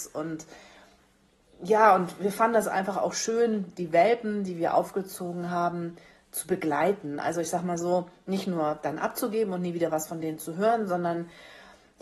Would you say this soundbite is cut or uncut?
uncut